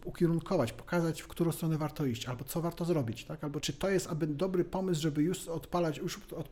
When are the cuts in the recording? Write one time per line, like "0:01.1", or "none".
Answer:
0:03.6